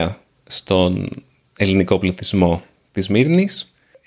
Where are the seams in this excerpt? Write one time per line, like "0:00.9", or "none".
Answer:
none